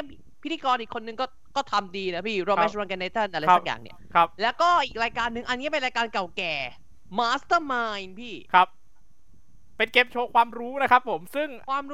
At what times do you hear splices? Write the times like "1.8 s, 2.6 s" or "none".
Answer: none

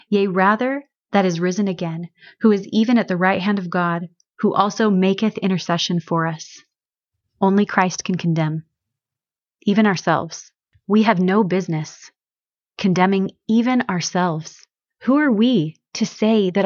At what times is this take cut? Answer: none

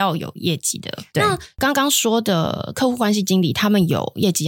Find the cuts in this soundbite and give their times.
1.1 s

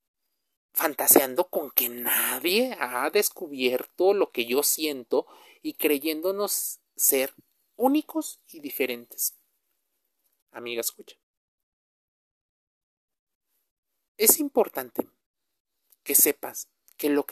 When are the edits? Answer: 10.4 s

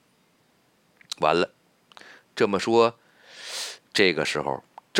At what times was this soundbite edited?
3.9 s

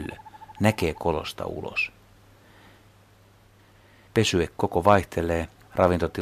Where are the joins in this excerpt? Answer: 4.1 s

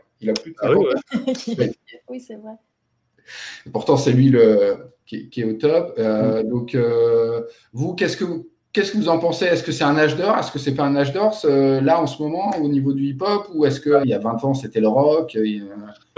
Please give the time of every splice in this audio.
14.0 s

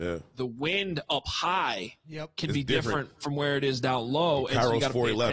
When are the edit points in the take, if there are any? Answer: none

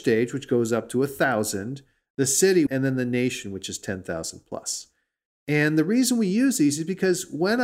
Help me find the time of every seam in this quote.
2.7 s

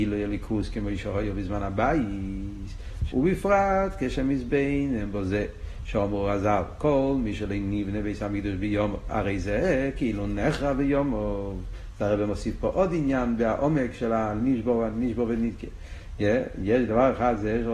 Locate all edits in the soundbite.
3.1 s

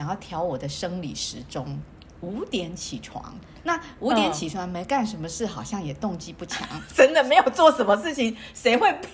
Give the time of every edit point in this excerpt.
2.2 s

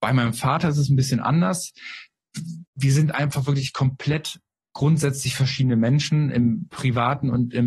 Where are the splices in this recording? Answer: 2.7 s

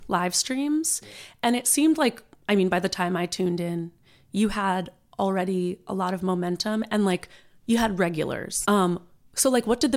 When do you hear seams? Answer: 8.6 s

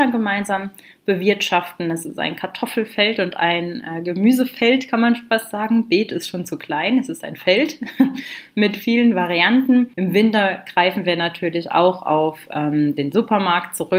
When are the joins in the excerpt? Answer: 9.9 s

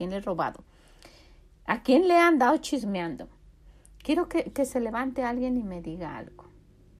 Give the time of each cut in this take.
4.0 s

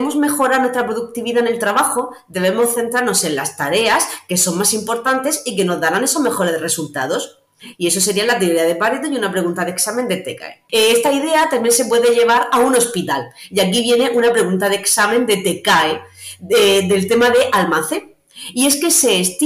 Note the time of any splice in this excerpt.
7.7 s, 10.7 s

